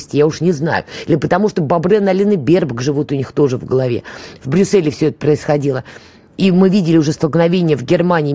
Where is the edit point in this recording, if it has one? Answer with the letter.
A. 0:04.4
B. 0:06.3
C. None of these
A